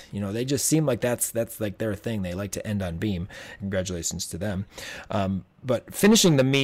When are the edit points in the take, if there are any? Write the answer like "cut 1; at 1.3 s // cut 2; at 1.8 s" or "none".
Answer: none